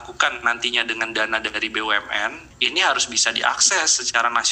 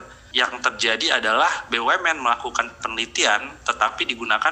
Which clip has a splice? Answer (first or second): first